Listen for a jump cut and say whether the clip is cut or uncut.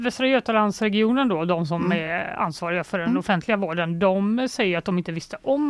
uncut